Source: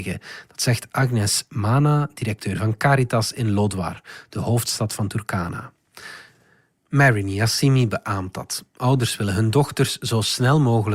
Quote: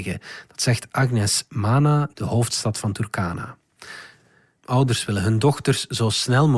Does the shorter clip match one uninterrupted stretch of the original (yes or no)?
no